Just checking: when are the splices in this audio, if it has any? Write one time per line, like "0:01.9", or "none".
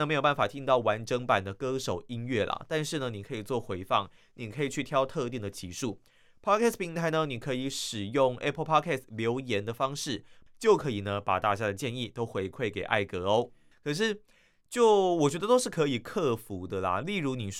0:10.5
0:13.7